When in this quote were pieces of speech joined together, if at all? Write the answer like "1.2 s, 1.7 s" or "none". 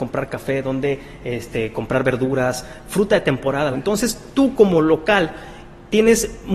3.7 s